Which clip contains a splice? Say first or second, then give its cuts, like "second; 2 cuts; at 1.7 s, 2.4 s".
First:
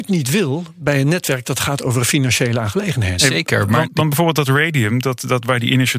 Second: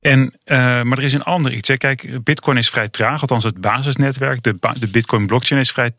first; 1 cut; at 3.8 s